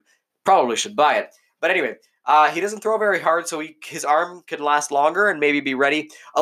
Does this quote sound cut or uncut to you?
uncut